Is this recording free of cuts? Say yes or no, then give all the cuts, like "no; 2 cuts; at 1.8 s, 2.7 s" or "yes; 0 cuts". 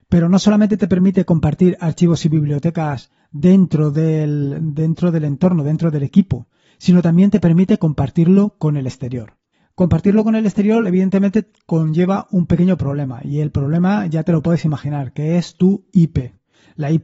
yes; 0 cuts